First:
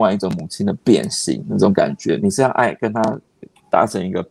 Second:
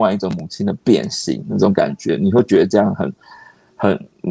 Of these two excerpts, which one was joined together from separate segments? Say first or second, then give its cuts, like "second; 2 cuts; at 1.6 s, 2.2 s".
first; 1 cut; at 2.2 s